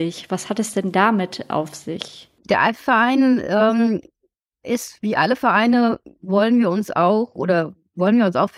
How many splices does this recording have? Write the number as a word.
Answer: zero